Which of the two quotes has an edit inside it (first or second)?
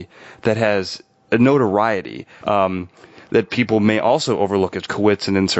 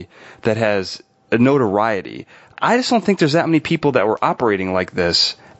first